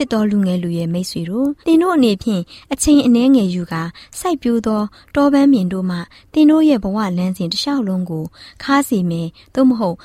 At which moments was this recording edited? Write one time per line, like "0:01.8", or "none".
0:01.6